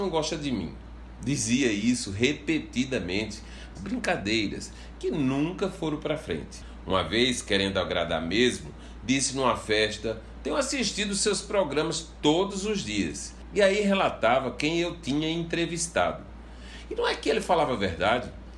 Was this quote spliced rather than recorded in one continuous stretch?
yes; 1 cut; at 3.7 s

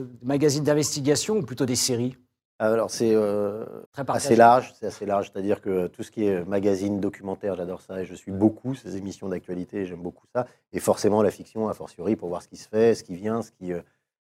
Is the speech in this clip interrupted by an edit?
yes; 1 cut; at 3.8 s

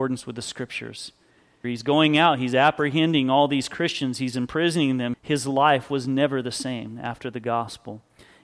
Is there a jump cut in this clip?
yes; 2 cuts; at 1.6 s, 5.1 s

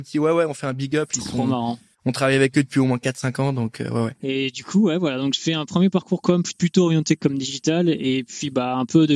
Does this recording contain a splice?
no; 0 cuts

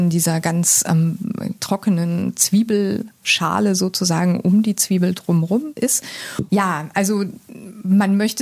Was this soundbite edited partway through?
yes; 2 cuts; at 1.6 s, 6.5 s

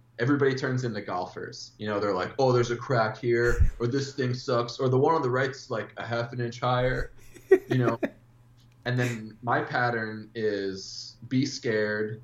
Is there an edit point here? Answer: no; 0 cuts

